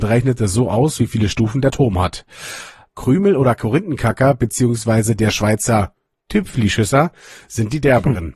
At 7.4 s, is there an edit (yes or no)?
no